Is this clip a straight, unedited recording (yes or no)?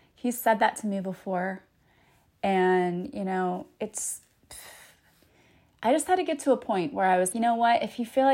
no